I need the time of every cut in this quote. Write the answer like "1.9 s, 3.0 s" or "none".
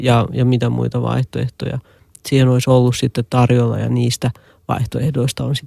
none